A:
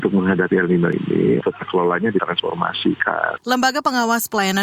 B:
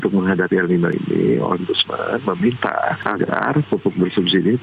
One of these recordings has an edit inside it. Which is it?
A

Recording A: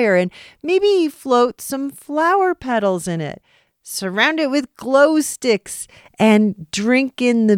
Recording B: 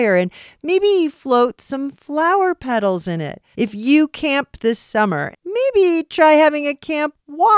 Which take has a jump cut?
B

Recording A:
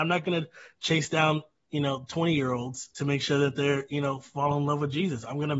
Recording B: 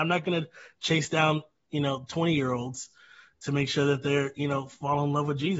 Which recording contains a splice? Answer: A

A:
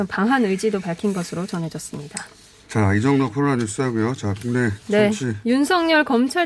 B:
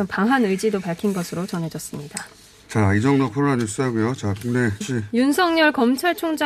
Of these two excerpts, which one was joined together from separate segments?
B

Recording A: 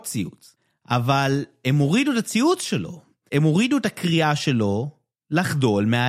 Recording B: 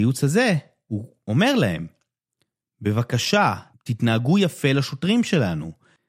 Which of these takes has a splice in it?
B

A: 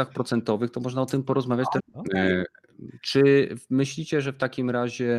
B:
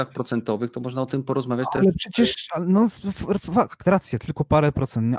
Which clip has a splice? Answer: A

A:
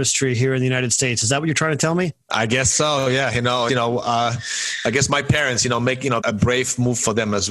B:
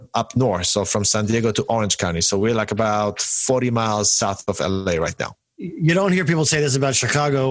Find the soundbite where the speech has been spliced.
A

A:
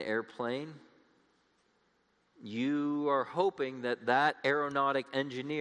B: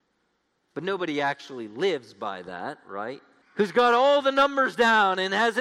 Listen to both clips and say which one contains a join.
B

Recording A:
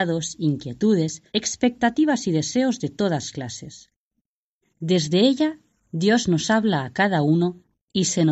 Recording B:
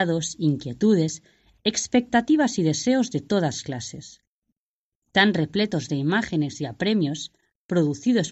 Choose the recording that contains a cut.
A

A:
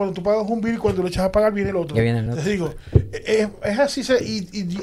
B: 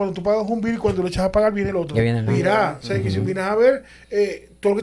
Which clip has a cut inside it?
B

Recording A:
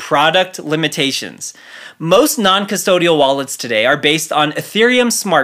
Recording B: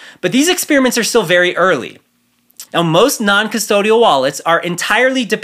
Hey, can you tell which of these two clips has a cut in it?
B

